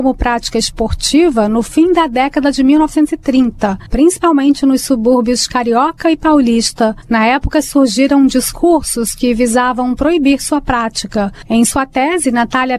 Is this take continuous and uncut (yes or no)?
no